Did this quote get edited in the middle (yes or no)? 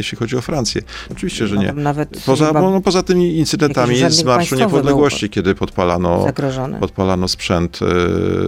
yes